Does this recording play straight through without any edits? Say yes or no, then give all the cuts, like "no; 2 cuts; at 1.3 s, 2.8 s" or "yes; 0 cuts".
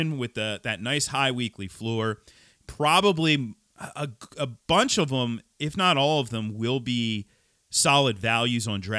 yes; 0 cuts